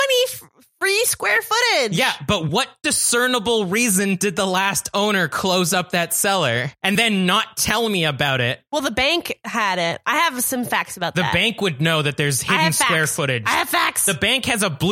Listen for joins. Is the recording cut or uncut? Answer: uncut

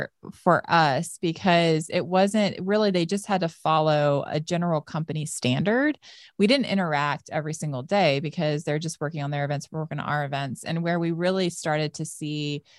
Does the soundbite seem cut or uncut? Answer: uncut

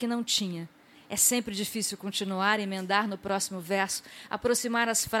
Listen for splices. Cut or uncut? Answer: cut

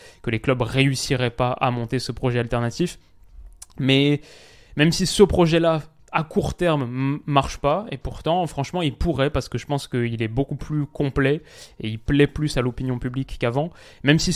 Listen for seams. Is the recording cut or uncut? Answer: uncut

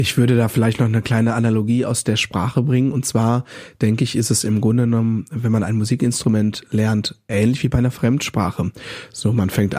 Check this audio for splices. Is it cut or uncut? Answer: uncut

